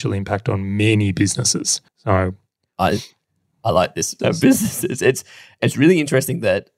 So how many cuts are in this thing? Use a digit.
2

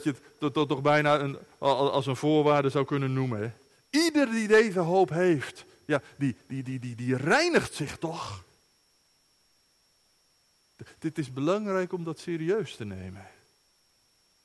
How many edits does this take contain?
0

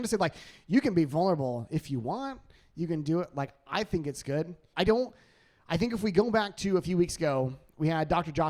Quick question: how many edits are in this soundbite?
1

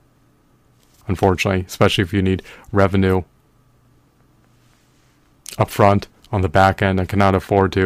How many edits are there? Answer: 1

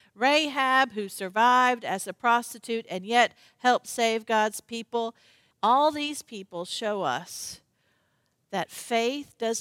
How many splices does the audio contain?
1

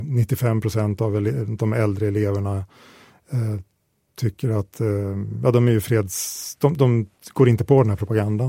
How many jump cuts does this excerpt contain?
0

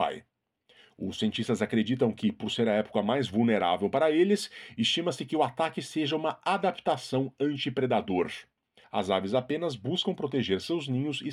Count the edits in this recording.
1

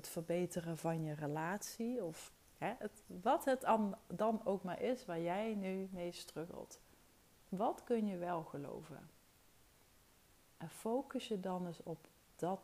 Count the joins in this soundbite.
0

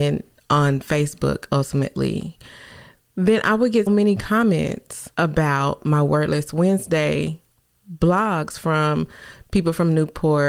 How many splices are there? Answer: 2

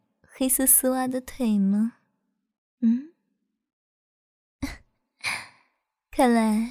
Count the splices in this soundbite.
0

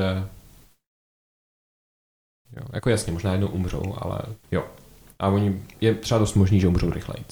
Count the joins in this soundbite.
2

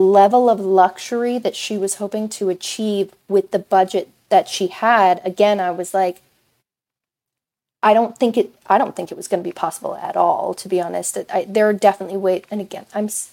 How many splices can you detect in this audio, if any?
0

